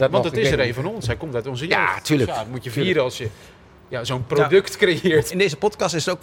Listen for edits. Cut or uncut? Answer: cut